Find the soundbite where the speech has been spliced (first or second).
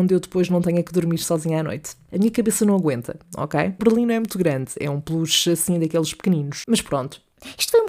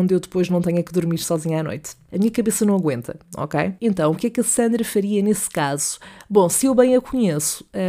first